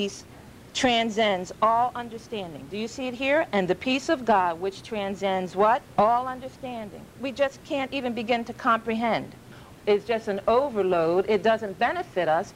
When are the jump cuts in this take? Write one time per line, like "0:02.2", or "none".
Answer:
0:09.8